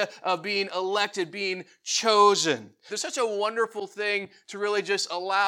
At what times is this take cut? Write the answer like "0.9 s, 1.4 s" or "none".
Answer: 2.9 s